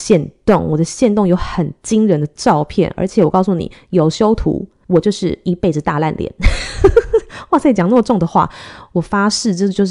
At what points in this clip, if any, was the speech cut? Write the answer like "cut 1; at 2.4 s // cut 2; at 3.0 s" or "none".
none

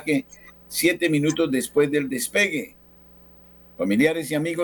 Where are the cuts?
none

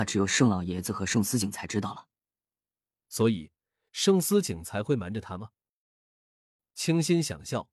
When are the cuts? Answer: cut 1; at 3.0 s

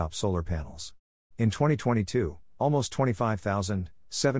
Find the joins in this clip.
cut 1; at 1.3 s

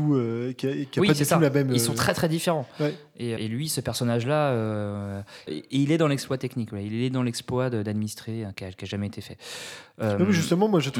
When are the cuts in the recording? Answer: cut 1; at 3.4 s // cut 2; at 5.5 s // cut 3; at 8.5 s

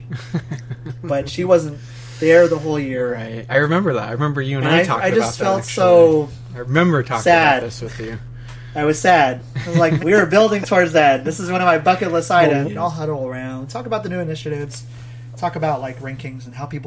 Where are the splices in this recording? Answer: cut 1; at 10.0 s // cut 2; at 12.6 s

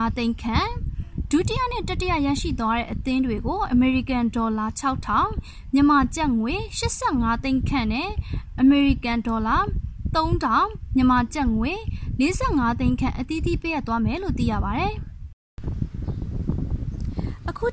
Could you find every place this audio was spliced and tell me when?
none

